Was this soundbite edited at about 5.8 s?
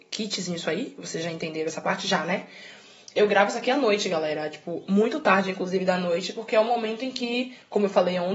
no; 0 cuts

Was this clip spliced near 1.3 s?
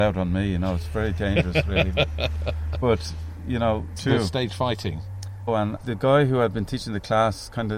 no; 2 cuts; at 4.0 s, 5.5 s

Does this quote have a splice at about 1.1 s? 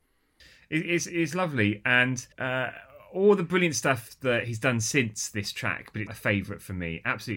no; 2 cuts; at 2.3 s, 6.1 s

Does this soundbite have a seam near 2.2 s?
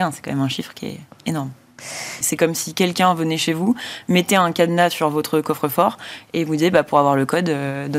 yes; 1 cut; at 2.2 s

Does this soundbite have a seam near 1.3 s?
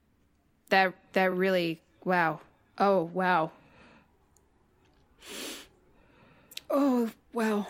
no; 0 cuts

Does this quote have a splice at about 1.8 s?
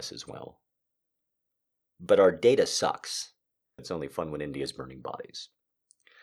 no; 1 cut; at 3.8 s

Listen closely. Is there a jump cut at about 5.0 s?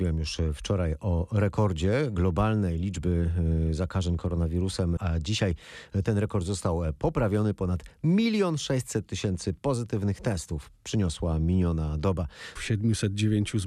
yes; 2 cuts; at 5.0 s, 12.6 s

